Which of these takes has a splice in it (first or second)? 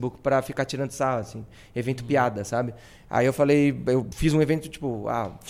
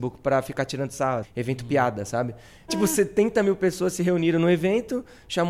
second